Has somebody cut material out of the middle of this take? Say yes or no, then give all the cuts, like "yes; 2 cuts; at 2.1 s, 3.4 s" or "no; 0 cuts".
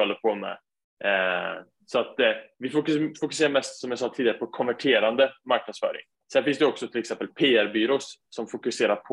yes; 1 cut; at 6.2 s